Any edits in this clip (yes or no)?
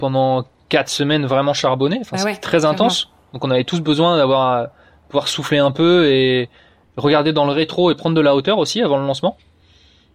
no